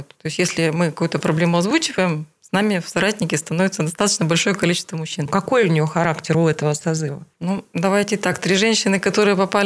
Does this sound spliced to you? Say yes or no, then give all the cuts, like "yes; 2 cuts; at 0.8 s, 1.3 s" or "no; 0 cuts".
yes; 1 cut; at 5.3 s